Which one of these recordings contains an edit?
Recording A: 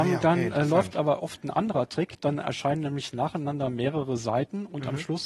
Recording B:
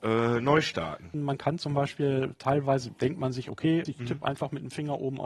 B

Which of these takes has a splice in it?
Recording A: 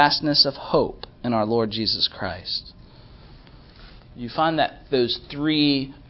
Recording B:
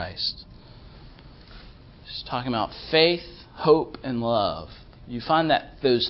A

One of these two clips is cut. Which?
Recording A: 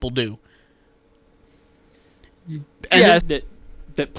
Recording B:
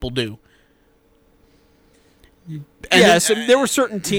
A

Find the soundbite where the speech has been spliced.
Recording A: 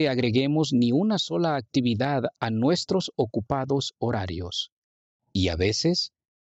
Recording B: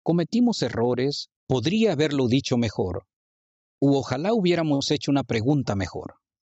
B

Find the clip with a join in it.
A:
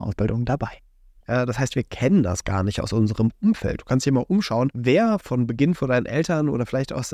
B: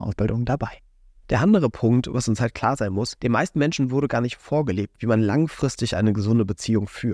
A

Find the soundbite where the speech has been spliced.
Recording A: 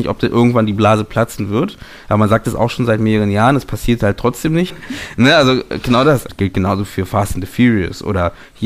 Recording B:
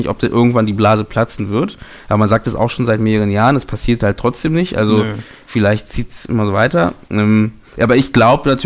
A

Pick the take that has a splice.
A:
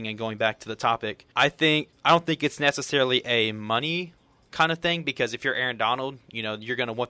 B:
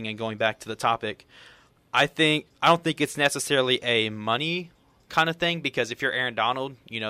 A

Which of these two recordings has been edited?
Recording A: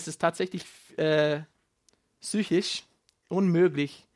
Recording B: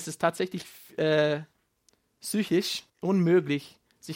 B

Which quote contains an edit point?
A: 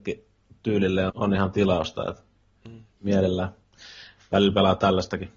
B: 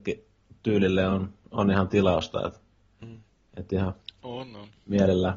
A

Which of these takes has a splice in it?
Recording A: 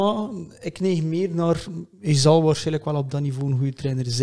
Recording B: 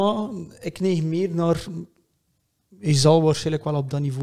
A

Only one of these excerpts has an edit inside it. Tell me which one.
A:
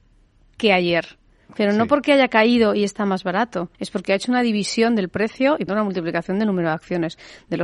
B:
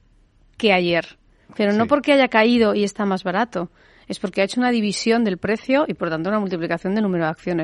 A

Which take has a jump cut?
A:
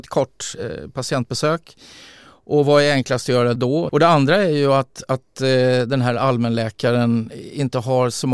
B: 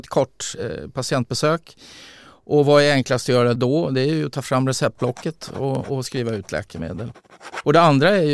A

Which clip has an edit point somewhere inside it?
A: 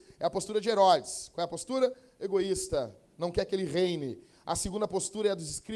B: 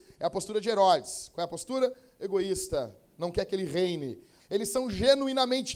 B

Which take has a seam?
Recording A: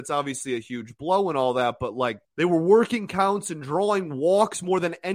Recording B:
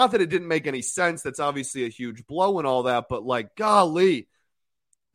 A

